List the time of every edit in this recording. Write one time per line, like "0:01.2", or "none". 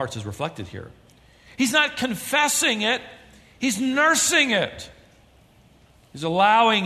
0:01.5